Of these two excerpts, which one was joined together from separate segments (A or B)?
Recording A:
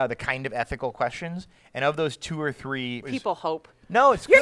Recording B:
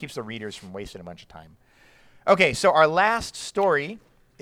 A